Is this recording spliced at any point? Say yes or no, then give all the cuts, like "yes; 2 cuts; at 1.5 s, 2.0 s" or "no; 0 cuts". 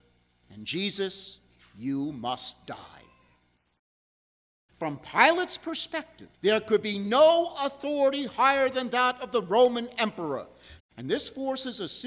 yes; 3 cuts; at 4.7 s, 6.3 s, 10.8 s